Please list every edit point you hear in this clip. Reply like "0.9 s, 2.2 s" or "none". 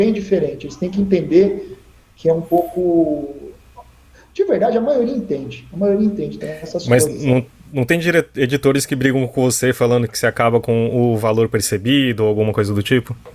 6.4 s, 10.1 s